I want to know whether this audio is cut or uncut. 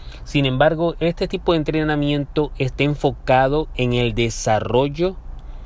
uncut